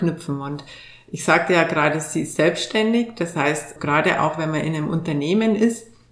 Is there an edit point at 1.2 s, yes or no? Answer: no